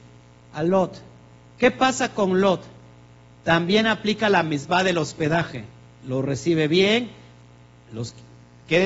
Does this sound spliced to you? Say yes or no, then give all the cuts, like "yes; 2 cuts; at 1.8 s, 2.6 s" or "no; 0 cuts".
no; 0 cuts